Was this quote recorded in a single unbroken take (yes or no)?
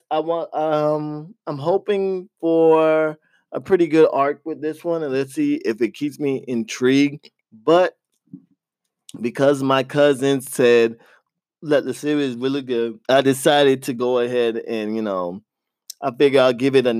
no